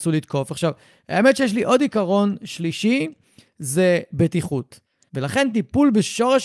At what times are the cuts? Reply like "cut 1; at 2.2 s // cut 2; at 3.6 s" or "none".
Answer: cut 1; at 5.1 s